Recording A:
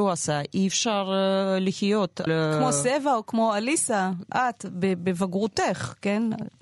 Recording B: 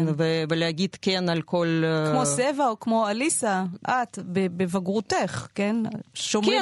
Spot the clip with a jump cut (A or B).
A